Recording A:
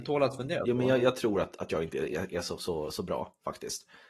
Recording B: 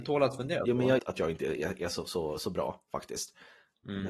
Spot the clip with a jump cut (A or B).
B